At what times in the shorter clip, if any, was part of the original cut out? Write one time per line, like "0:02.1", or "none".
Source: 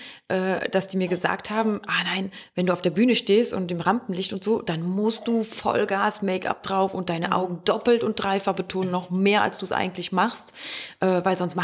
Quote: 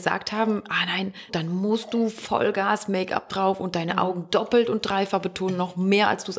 0:01.3